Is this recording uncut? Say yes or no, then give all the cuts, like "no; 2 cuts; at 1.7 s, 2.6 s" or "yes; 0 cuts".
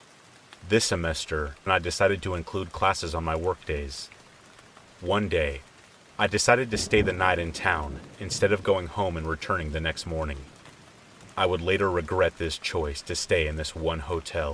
no; 1 cut; at 1.7 s